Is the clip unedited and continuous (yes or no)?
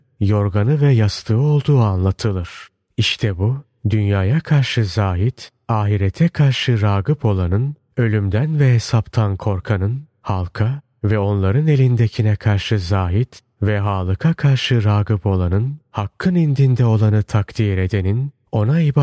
yes